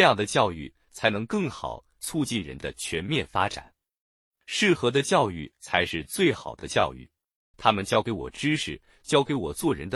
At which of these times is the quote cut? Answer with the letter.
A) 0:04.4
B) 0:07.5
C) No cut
B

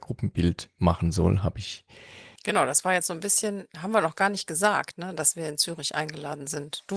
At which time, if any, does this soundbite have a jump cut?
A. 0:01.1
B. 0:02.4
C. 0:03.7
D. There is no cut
B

